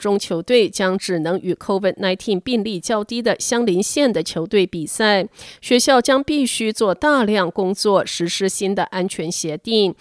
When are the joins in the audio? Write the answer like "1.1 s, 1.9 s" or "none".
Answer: none